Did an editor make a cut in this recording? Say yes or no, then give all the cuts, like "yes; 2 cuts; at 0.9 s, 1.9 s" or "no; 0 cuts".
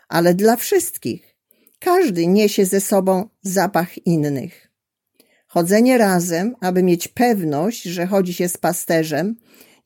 no; 0 cuts